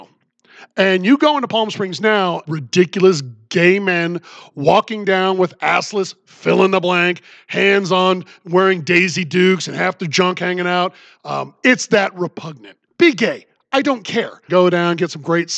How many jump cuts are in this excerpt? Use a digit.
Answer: 3